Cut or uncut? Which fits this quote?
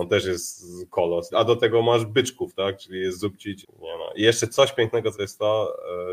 cut